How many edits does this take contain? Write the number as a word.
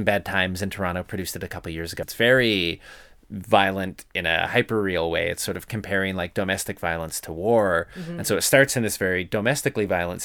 one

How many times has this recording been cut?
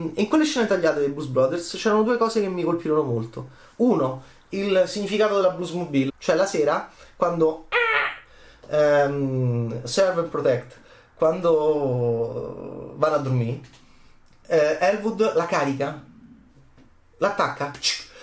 one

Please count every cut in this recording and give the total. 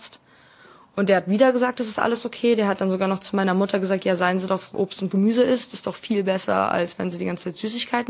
one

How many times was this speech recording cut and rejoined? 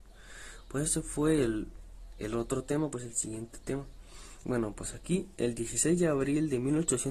one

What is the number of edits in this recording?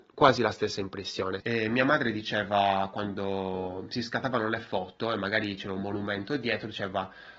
one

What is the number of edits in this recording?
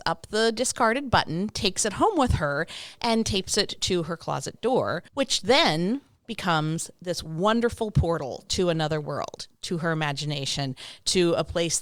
one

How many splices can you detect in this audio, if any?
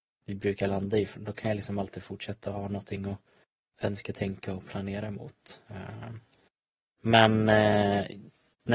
one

